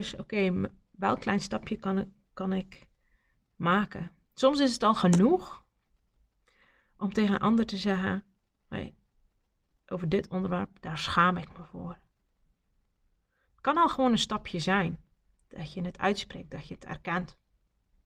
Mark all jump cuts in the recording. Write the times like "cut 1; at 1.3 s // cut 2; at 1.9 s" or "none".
none